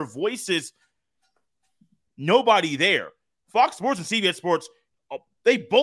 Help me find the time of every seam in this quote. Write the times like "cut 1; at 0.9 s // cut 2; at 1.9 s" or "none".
cut 1; at 2.1 s